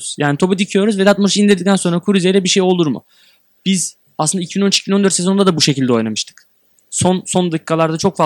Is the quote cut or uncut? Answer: uncut